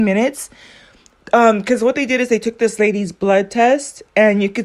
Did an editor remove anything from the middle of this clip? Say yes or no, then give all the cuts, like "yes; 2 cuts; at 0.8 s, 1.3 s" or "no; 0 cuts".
no; 0 cuts